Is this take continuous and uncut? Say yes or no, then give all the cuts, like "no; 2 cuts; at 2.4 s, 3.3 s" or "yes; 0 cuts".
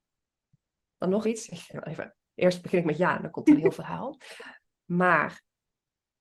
no; 2 cuts; at 1.2 s, 4.8 s